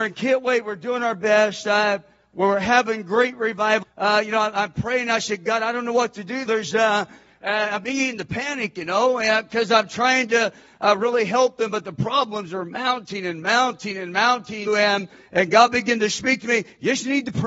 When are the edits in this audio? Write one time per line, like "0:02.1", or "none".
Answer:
0:03.8
0:06.5
0:14.7